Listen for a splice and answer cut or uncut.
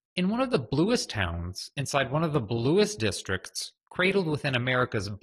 uncut